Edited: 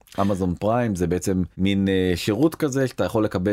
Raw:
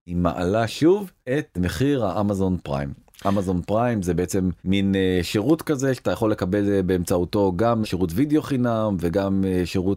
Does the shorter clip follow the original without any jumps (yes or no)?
yes